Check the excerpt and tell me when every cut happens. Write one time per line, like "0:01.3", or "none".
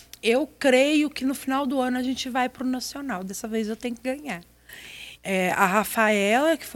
0:05.2